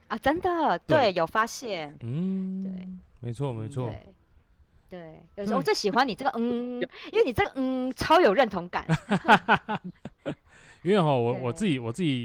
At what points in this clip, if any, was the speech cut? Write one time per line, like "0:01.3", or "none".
0:02.0